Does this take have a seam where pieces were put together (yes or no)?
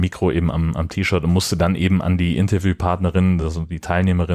no